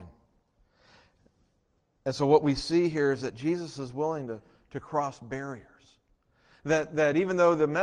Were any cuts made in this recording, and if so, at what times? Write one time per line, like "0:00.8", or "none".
none